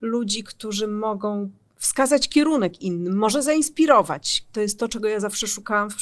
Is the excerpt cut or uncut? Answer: cut